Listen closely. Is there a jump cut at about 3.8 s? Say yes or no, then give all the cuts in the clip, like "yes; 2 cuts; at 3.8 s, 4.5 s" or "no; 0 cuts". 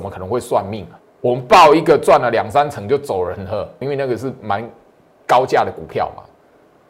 yes; 2 cuts; at 1.0 s, 3.8 s